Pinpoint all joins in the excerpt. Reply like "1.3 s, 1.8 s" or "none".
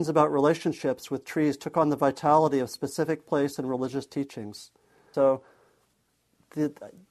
5.1 s